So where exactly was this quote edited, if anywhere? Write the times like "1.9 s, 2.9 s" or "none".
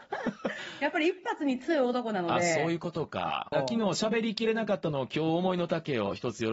3.5 s